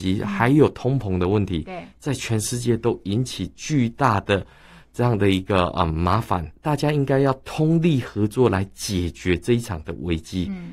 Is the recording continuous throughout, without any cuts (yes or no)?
no